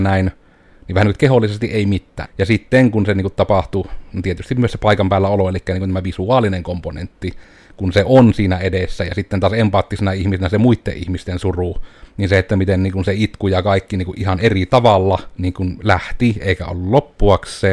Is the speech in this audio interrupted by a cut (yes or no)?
yes